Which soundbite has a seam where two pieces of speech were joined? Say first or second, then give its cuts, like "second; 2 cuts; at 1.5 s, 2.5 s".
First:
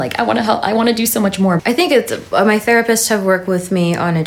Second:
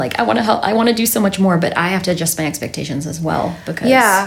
first; 1 cut; at 1.6 s